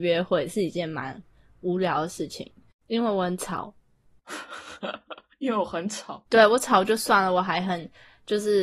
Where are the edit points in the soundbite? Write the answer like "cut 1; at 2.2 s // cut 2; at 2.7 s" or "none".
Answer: cut 1; at 2.7 s // cut 2; at 6.3 s